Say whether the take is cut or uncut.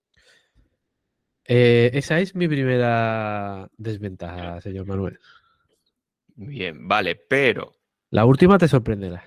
uncut